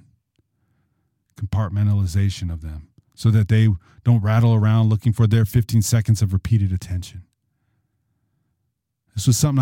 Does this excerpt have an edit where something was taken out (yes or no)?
yes